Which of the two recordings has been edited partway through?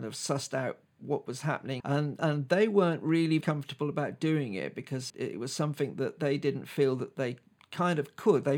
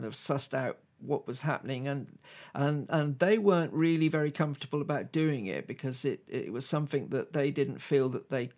first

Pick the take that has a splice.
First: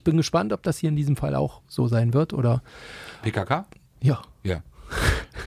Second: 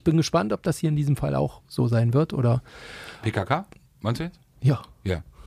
first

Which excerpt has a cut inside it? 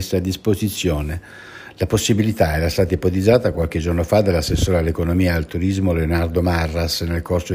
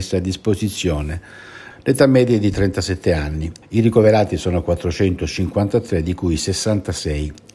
second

